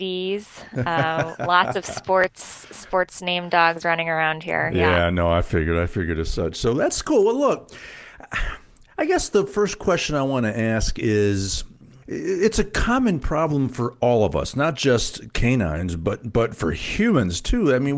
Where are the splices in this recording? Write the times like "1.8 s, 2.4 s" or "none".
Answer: none